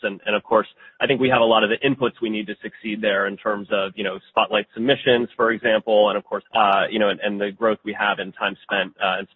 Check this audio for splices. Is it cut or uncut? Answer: cut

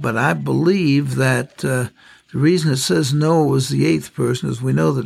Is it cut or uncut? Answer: uncut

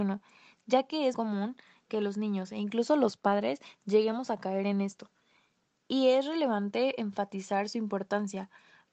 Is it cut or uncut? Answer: cut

